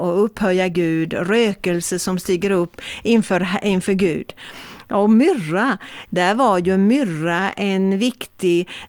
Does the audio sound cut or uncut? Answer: cut